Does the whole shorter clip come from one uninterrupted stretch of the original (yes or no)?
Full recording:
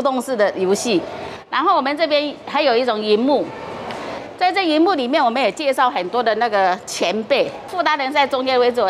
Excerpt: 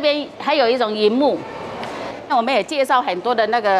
no